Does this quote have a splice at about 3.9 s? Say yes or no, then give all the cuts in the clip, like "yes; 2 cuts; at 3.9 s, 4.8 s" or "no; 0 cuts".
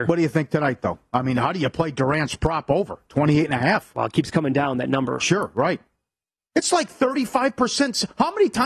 no; 1 cut; at 6.4 s